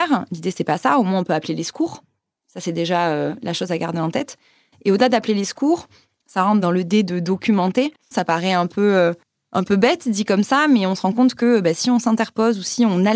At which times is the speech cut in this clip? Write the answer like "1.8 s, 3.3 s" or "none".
8.1 s